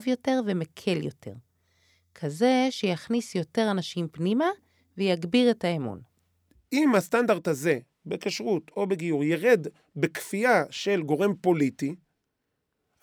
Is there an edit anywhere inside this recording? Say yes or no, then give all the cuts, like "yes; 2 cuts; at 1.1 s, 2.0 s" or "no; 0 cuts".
no; 0 cuts